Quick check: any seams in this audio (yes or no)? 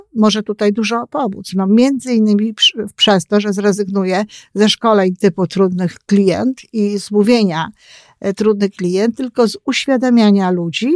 no